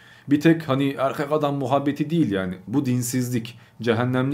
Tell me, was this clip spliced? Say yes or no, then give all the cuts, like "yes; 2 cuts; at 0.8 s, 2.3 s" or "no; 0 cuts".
yes; 1 cut; at 2.7 s